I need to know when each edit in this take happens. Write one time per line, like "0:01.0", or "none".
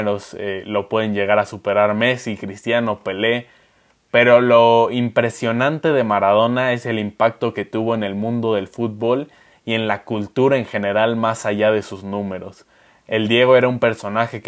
none